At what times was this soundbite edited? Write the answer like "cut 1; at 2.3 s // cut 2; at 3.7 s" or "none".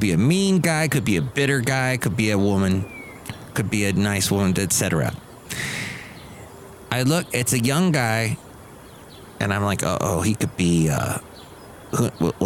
none